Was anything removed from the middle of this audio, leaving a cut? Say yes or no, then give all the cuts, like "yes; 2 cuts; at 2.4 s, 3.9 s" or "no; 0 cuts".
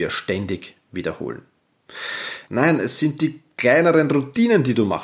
yes; 1 cut; at 2.5 s